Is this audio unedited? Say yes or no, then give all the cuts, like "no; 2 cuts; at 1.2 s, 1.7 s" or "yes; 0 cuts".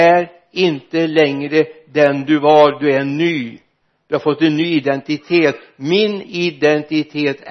yes; 0 cuts